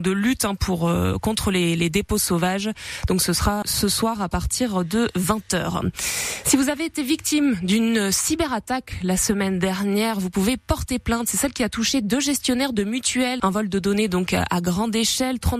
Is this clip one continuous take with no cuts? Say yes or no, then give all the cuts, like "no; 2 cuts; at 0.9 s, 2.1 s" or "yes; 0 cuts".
no; 2 cuts; at 3.6 s, 13.4 s